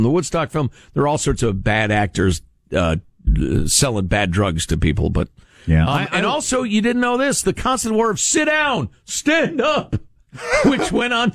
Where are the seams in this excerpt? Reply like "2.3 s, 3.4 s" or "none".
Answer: none